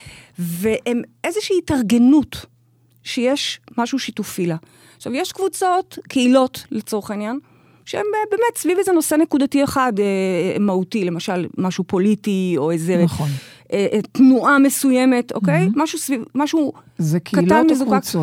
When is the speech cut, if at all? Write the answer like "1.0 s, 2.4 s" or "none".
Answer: none